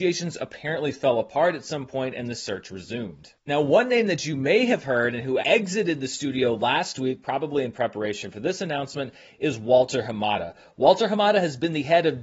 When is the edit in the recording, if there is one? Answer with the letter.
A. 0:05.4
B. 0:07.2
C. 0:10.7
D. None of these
A